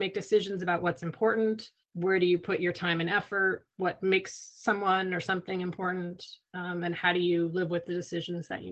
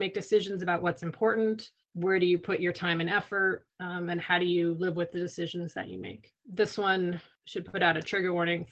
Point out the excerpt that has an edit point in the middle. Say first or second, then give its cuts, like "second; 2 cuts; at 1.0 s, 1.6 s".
second; 1 cut; at 3.7 s